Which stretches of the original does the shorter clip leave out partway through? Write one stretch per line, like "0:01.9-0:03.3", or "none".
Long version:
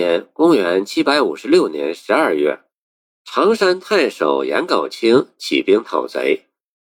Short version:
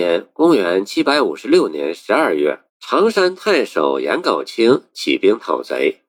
0:02.7-0:03.1

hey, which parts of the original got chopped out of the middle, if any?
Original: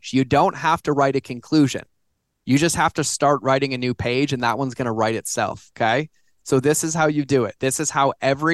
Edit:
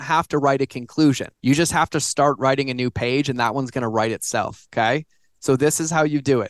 0:01.9-0:02.4

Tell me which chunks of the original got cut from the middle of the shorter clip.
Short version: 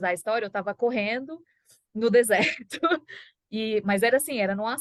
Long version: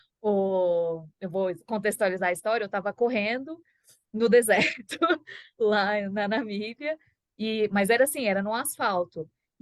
0:05.6-0:07.2

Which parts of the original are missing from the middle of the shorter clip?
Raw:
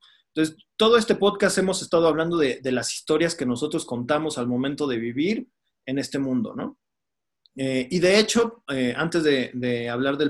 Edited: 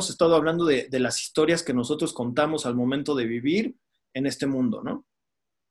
none

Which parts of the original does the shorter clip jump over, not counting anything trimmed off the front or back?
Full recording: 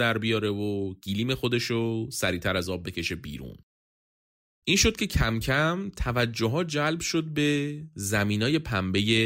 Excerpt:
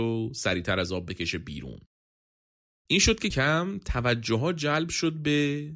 0:05.1-0:05.4

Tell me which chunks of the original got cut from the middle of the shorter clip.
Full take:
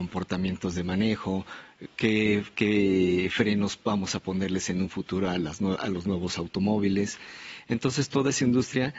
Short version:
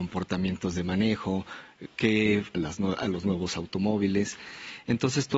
0:02.5-0:05.4

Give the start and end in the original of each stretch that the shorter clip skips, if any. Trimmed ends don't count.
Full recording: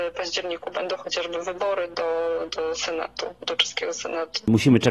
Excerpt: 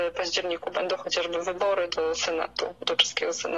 0:01.9-0:02.5

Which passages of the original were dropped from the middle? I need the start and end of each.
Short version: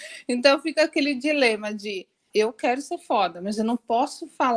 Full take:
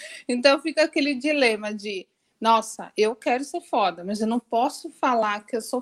0:02.3-0:02.9

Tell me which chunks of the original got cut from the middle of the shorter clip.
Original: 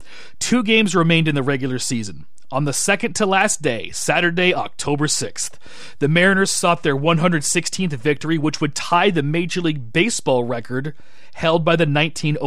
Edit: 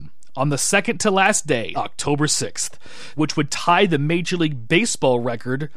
0:03.9-0:04.5
0:06.0-0:08.4

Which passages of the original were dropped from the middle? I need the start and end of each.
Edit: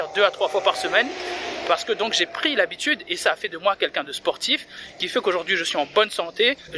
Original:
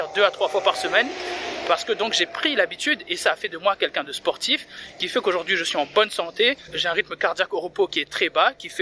none

